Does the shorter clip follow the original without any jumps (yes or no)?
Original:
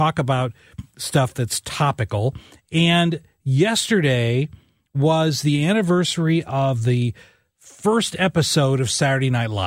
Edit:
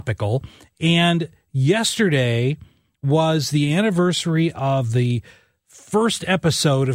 yes